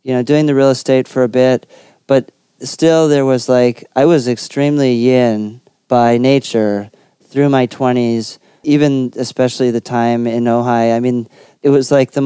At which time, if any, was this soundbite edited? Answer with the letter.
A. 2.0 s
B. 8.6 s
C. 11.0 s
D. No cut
B